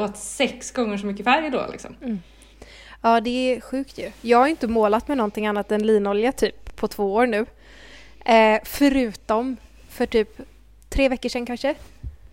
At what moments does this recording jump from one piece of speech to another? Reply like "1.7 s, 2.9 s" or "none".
none